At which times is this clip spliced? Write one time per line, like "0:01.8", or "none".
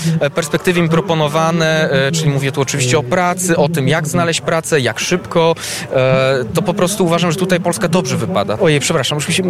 0:08.6

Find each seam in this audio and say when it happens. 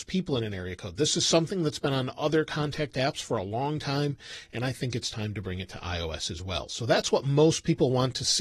none

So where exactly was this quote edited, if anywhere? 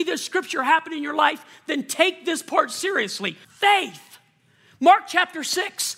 0:03.4

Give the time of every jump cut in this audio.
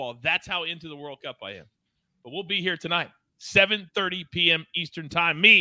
none

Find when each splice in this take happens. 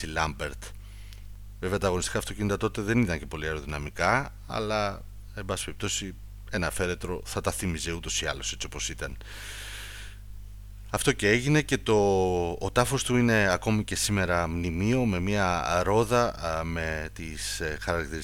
none

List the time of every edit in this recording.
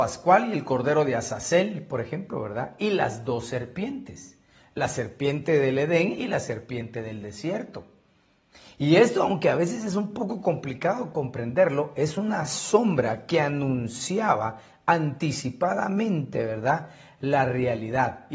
none

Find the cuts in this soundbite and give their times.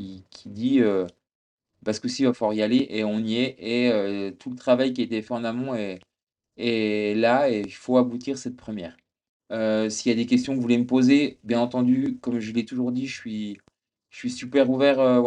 0:09.4

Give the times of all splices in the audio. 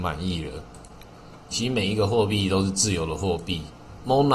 0:01.5

